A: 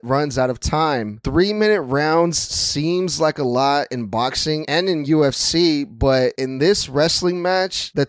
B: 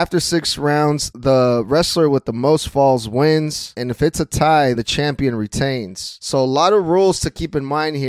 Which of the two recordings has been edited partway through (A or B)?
B